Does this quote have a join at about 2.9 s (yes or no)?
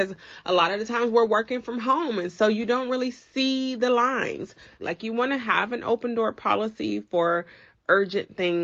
no